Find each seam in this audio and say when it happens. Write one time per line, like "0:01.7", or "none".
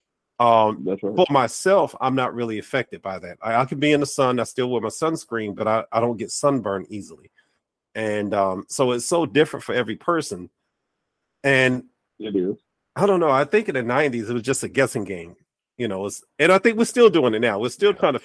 none

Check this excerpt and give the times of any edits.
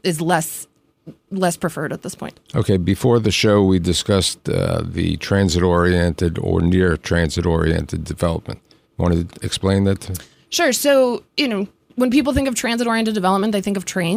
none

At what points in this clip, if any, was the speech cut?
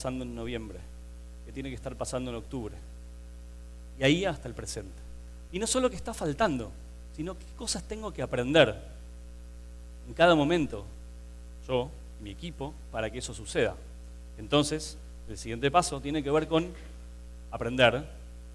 0:05.5

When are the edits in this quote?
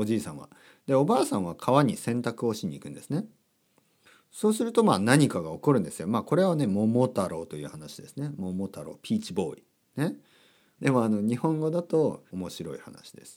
0:10.8
0:12.3

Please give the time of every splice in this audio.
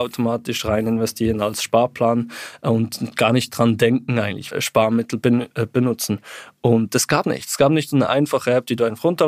0:04.5
0:07.2

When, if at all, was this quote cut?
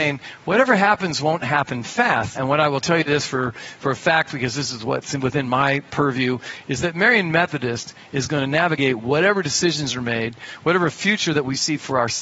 0:02.4

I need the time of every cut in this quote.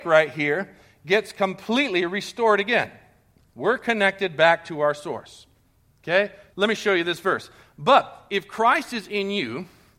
0:06.5

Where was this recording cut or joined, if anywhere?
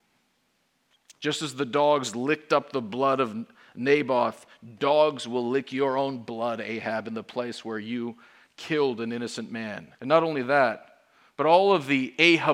0:09.9

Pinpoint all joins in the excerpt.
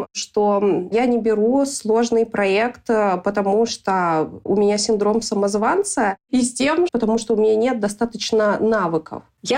0:06.9

